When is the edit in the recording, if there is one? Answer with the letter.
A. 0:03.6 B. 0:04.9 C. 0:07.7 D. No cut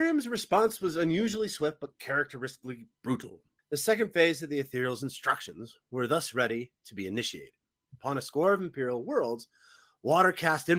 A